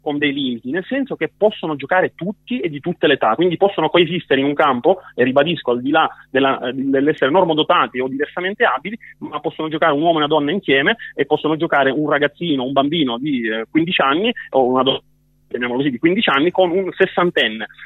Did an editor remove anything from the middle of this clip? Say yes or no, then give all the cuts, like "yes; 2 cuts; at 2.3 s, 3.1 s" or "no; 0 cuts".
no; 0 cuts